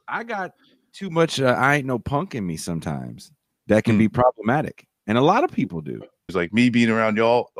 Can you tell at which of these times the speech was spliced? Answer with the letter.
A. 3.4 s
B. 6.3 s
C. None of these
B